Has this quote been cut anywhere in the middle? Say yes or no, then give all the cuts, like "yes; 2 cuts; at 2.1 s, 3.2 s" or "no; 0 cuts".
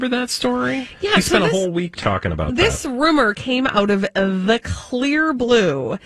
no; 0 cuts